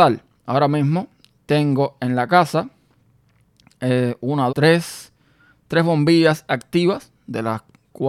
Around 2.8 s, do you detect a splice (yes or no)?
no